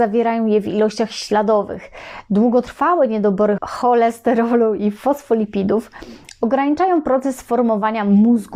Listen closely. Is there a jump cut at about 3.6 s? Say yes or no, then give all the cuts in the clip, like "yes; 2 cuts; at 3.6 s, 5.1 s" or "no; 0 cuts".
yes; 1 cut; at 3.6 s